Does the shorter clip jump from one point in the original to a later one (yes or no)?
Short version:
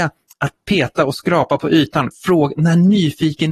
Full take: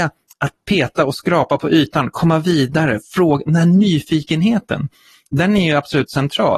yes